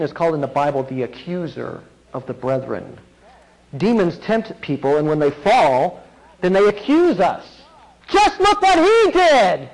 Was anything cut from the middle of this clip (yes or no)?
yes